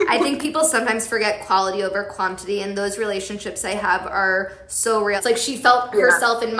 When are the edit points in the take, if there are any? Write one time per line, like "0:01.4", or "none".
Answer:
0:05.2

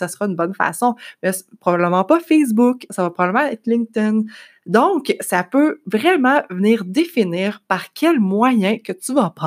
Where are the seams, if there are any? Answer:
none

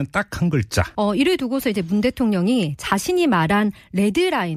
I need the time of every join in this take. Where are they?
0:01.0

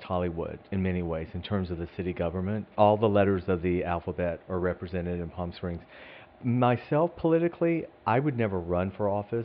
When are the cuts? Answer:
0:02.7

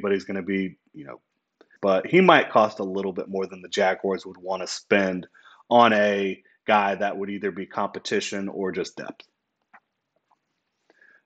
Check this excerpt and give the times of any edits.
0:01.8

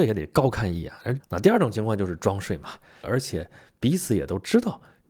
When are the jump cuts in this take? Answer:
0:01.2
0:03.0

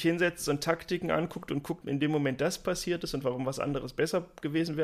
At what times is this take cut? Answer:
0:01.8

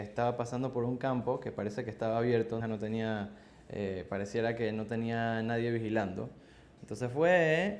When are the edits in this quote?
0:02.6

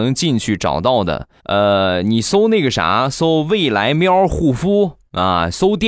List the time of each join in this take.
0:01.4

